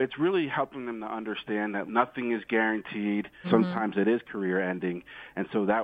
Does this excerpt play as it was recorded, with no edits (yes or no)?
no